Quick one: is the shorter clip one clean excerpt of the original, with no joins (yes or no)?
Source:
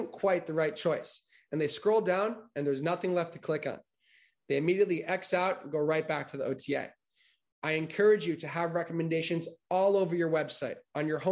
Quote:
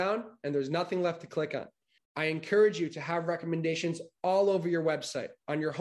no